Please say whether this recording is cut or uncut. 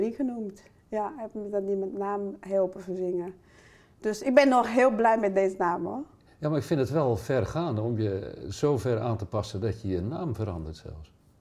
uncut